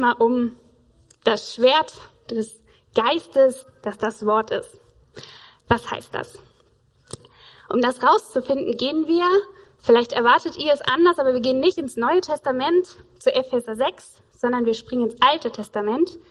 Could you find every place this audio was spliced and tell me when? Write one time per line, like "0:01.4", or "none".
none

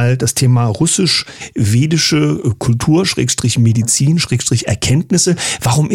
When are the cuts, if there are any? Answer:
none

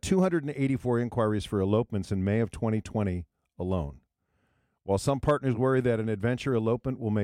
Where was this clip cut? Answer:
none

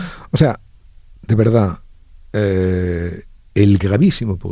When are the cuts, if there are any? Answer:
none

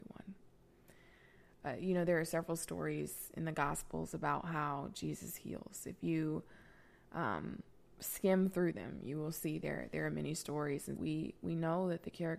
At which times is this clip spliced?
0:11.0

